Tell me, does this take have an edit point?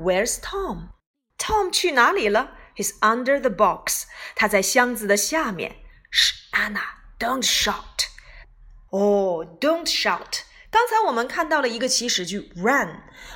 yes; 1 cut; at 8.9 s

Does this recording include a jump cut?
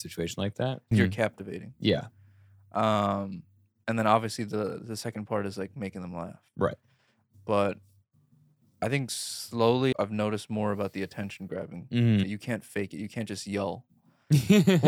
yes; 3 cuts; at 0.9 s, 9.9 s, 12.2 s

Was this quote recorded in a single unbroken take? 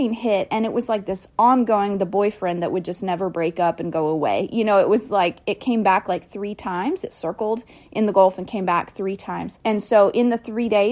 no; 1 cut; at 9.6 s

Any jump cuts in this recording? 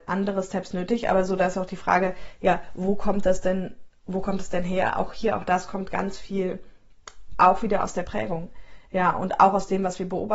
no; 0 cuts

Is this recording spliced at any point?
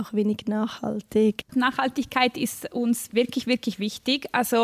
yes; 1 cut; at 1.4 s

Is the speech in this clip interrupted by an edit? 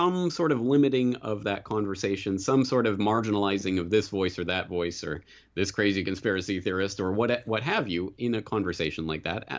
no; 0 cuts

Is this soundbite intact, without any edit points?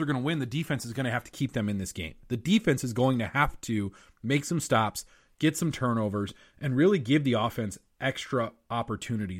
yes; 0 cuts

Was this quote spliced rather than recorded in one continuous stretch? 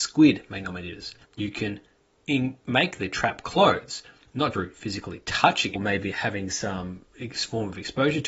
yes; 2 cuts; at 1.2 s, 4.5 s

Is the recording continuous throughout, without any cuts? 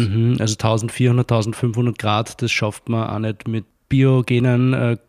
yes; 0 cuts

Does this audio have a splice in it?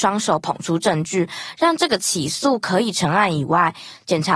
no; 0 cuts

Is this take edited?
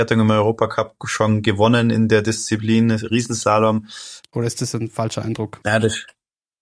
yes; 2 cuts; at 4.2 s, 5.6 s

